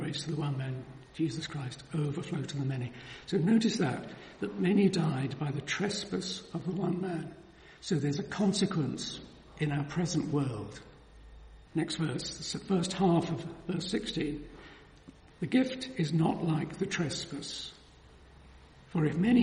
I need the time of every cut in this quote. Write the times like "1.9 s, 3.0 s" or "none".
11.7 s, 15.3 s